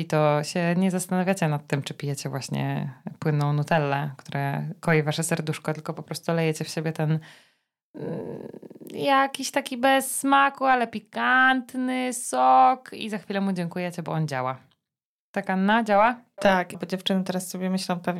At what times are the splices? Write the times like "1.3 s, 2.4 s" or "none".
16.7 s